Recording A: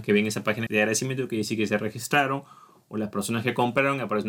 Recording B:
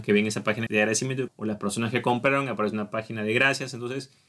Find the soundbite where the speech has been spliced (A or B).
B